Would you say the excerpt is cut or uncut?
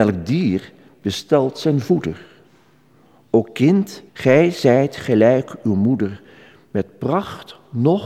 cut